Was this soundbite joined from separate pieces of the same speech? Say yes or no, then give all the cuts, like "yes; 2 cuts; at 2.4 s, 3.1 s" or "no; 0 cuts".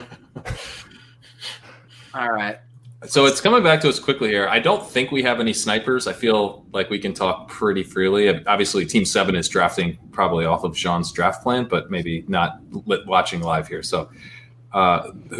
no; 0 cuts